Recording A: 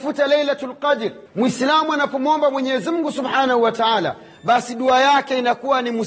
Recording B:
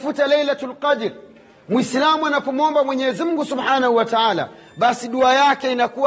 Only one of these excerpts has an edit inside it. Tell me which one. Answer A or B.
A